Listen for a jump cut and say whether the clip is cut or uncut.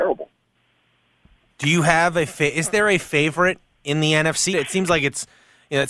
cut